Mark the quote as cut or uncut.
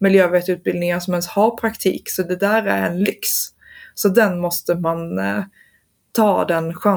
uncut